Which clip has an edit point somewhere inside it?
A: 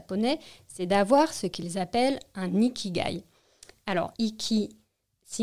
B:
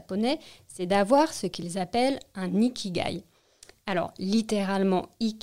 A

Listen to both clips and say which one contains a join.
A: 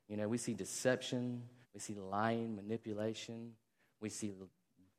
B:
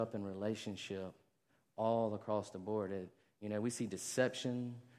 A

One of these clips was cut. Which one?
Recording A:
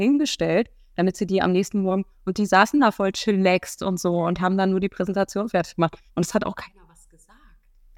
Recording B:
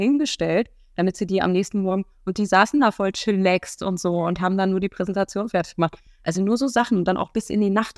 A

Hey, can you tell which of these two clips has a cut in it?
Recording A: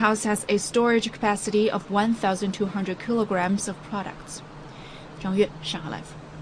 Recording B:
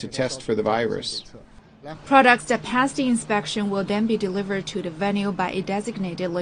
A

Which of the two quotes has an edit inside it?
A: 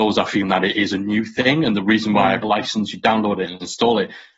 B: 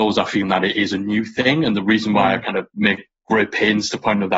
A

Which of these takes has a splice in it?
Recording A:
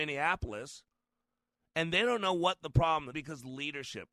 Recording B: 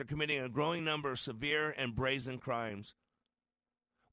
A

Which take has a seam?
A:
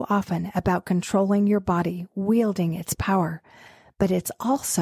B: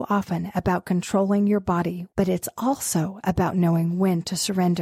B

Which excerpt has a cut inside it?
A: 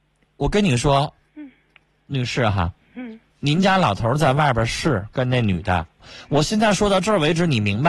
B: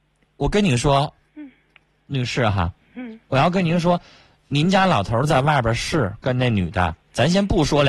A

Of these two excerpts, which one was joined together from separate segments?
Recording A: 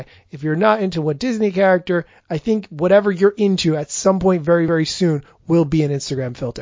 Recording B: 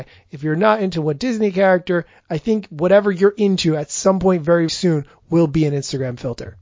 B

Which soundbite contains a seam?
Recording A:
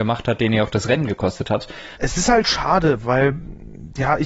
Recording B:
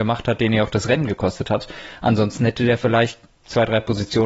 A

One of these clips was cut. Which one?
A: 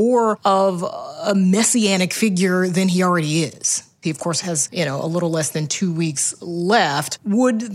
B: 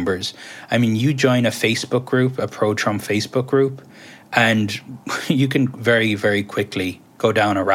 A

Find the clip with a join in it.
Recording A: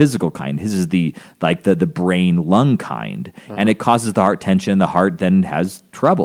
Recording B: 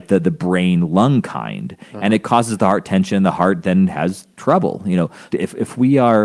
B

